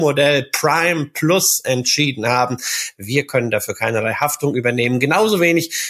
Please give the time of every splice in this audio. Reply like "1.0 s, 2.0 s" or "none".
2.9 s